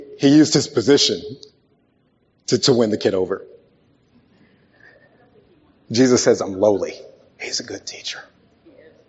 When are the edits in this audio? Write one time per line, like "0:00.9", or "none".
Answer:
0:02.6
0:07.3